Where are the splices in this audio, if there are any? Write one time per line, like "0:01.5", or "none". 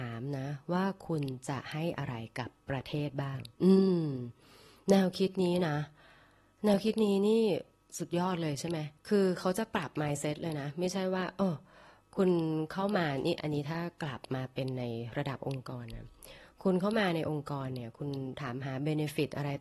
0:03.5
0:09.0